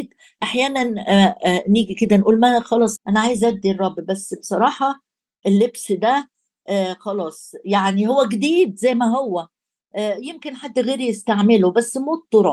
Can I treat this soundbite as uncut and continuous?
no; 1 cut; at 3.0 s

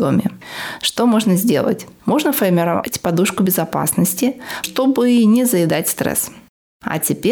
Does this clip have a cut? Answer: yes; 1 cut; at 4.6 s

